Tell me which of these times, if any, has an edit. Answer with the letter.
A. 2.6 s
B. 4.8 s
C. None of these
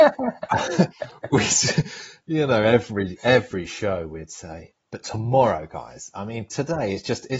B